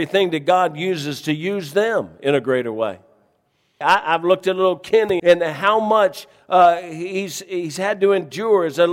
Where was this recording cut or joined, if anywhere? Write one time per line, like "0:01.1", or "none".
0:03.8
0:05.2

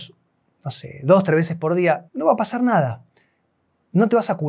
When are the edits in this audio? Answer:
0:02.1

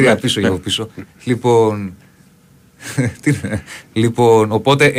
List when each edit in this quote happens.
0:03.8

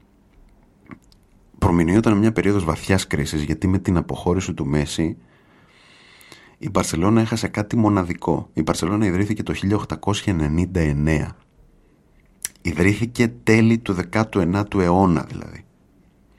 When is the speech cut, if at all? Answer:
none

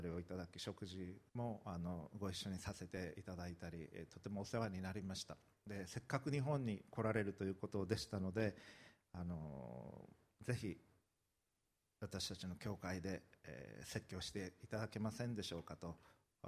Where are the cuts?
0:01.3

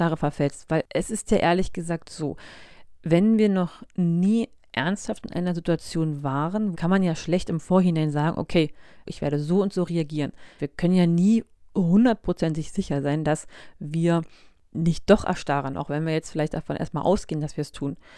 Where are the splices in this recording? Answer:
0:06.7
0:09.1
0:10.6

